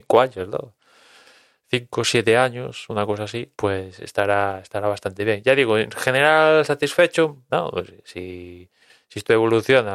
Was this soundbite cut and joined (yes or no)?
yes